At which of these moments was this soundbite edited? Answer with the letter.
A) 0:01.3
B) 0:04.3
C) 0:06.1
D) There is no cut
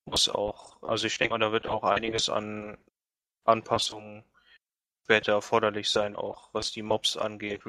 C